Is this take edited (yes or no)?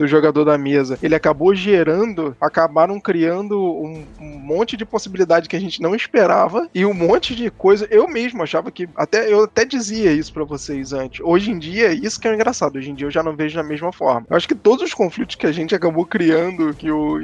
yes